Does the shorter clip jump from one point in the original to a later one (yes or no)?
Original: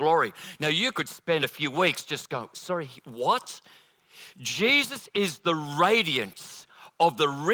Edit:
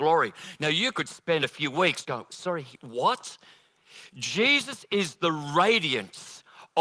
yes